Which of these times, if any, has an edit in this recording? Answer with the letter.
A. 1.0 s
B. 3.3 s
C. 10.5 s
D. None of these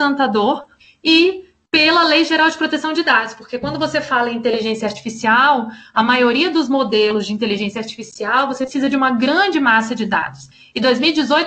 D